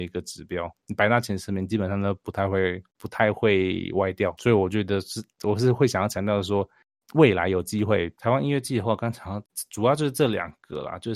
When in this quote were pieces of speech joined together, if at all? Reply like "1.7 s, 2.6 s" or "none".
8.2 s